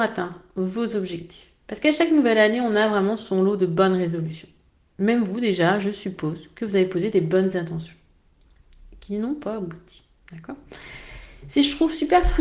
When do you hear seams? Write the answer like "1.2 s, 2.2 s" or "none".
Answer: none